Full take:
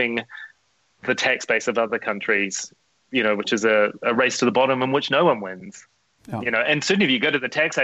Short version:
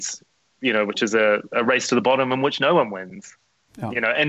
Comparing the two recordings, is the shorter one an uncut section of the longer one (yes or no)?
yes